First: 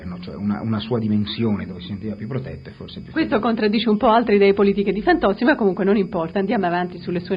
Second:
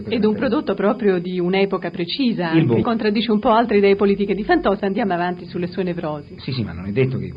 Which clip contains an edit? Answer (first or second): second